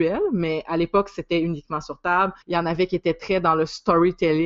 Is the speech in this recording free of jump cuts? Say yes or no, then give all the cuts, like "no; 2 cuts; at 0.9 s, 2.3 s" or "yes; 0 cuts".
no; 1 cut; at 2.4 s